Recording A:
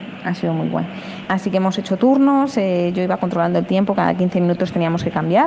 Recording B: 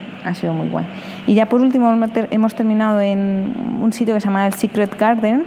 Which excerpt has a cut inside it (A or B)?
A